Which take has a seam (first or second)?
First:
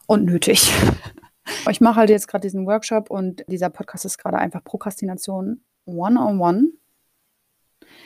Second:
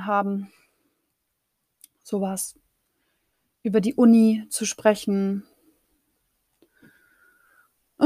first